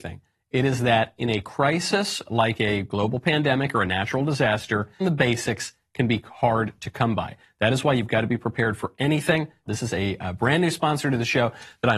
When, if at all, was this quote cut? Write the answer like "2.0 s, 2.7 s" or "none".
5.0 s, 9.7 s